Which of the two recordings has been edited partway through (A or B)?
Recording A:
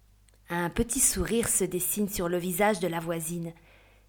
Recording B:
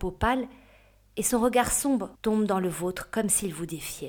B